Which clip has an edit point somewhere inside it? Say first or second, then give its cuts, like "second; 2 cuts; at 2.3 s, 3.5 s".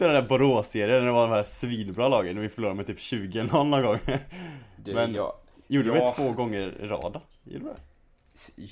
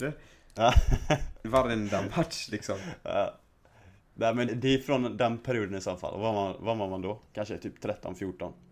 second; 1 cut; at 4.5 s